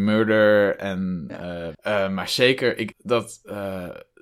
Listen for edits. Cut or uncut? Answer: cut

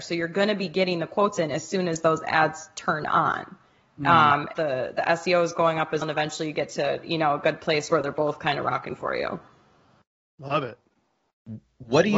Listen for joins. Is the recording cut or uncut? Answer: cut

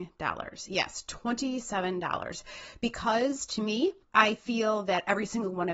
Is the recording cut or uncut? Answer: uncut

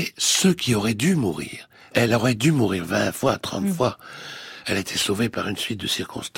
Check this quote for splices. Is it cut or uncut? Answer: uncut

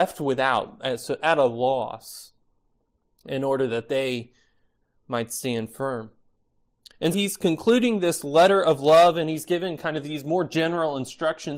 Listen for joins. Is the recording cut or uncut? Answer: cut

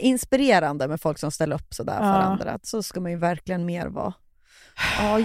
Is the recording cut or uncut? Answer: uncut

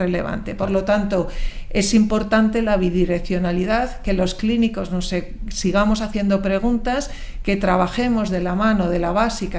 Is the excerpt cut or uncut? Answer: uncut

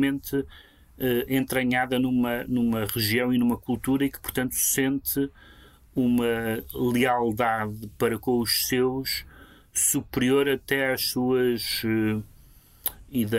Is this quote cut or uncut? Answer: uncut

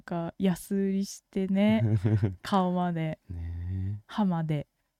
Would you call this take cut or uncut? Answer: uncut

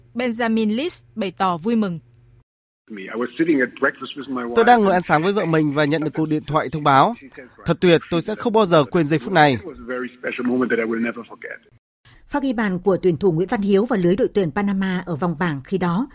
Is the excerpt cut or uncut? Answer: cut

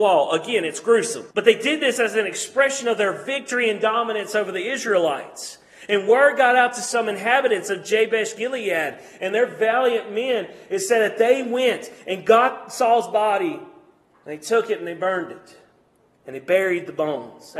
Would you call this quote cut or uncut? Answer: cut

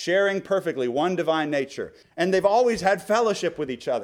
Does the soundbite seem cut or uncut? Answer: cut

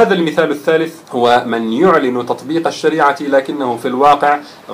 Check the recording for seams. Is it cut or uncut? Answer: cut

